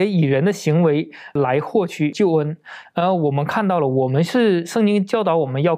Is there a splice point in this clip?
yes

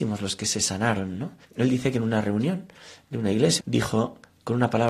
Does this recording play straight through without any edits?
no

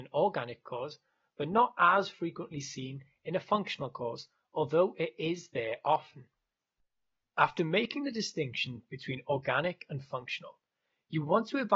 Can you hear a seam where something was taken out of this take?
no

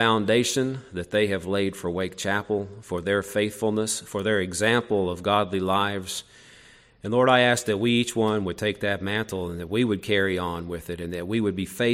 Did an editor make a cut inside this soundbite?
no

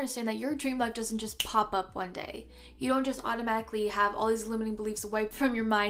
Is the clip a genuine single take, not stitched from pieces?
yes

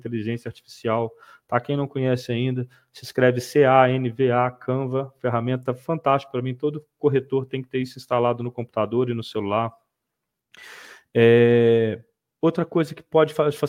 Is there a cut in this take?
no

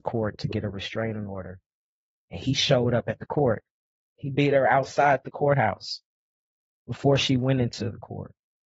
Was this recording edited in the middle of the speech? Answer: no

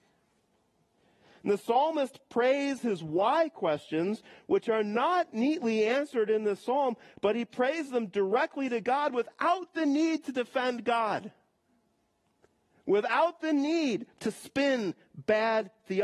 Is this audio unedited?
yes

